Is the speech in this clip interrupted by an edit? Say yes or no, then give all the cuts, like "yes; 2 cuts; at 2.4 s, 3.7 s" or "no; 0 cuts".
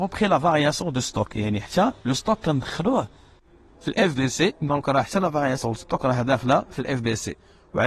yes; 1 cut; at 2.0 s